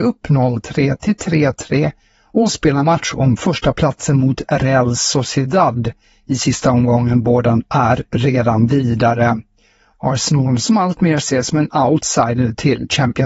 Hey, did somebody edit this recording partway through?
yes; 1 cut; at 9.9 s

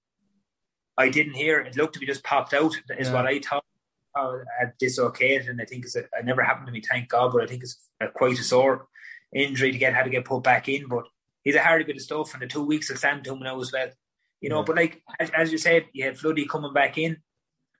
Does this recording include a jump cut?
no; 0 cuts

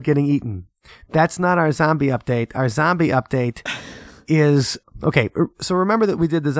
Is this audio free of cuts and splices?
yes; 0 cuts

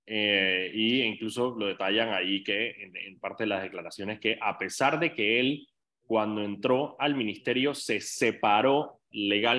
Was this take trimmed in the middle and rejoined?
no; 0 cuts

